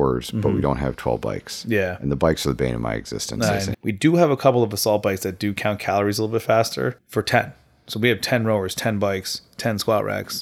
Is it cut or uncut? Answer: cut